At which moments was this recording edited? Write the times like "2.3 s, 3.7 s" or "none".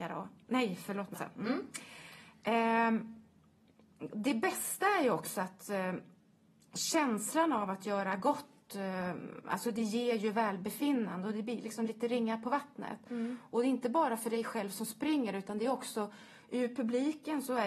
1.1 s